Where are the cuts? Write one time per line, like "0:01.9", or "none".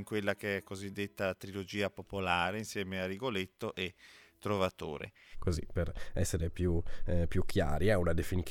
0:05.3